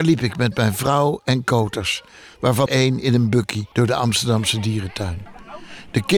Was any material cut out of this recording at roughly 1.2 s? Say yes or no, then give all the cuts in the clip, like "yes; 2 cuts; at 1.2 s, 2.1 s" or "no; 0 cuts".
no; 2 cuts; at 2.7 s, 3.7 s